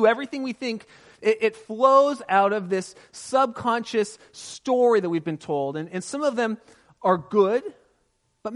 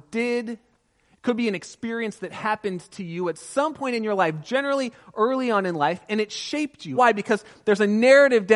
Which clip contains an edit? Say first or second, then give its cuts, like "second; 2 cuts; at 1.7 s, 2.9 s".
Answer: second; 1 cut; at 6.9 s